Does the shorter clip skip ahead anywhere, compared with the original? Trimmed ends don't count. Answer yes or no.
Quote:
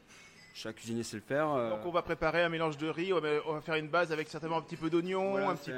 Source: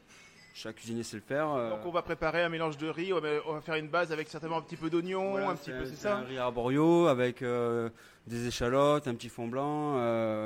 no